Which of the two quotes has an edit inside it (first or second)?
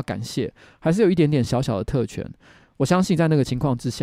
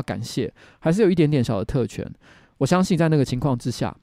second